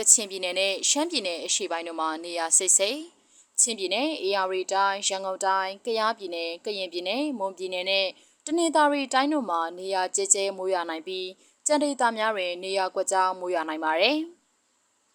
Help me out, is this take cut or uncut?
uncut